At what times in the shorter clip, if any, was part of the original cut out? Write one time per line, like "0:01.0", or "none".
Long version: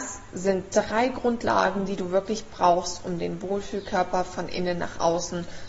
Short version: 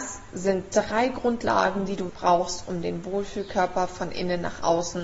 0:02.1